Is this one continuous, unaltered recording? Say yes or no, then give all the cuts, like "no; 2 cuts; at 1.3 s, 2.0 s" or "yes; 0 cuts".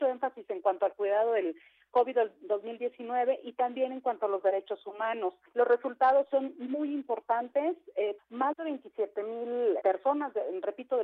no; 3 cuts; at 5.5 s, 8.2 s, 9.8 s